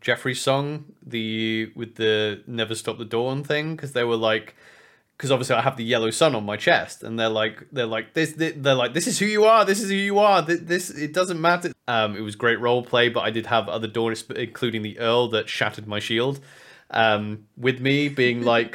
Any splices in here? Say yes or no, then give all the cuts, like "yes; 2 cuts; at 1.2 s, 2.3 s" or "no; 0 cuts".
yes; 1 cut; at 11.7 s